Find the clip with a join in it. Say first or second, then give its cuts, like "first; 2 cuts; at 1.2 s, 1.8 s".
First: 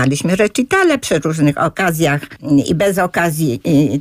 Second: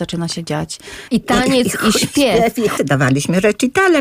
second; 2 cuts; at 1.1 s, 2.8 s